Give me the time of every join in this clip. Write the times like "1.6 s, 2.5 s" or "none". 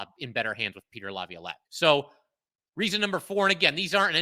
1.6 s